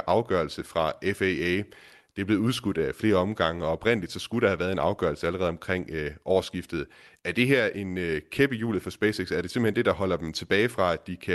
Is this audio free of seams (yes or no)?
yes